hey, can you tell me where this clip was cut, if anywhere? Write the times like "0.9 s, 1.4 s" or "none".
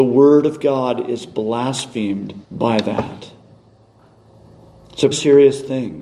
2.4 s, 5.1 s